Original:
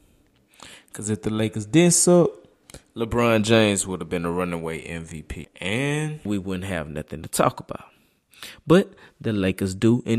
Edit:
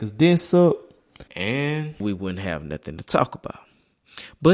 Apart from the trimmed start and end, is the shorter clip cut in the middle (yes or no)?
yes